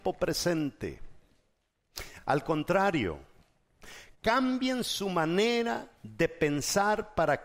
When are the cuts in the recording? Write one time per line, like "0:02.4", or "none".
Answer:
none